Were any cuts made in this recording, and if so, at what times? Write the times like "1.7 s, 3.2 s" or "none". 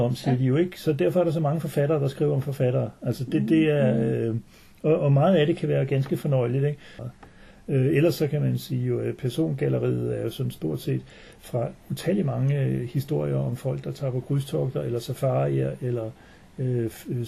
7.0 s